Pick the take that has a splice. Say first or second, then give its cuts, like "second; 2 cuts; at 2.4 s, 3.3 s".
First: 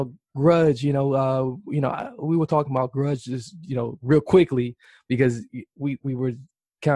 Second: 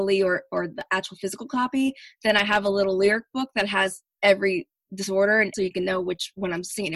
second; 1 cut; at 5.5 s